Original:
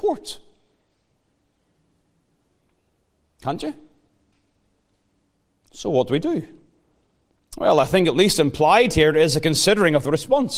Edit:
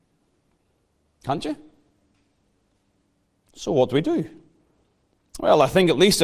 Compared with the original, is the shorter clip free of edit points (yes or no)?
yes